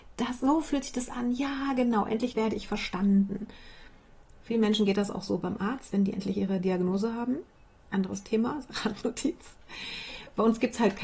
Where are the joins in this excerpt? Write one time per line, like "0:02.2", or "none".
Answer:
none